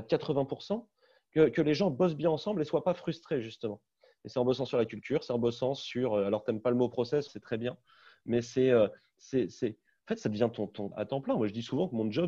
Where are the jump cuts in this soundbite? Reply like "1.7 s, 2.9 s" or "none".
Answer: 7.3 s, 10.9 s